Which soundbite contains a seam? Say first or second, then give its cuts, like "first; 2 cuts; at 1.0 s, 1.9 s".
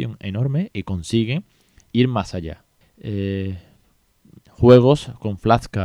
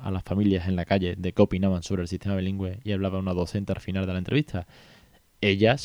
first; 2 cuts; at 2.8 s, 4.4 s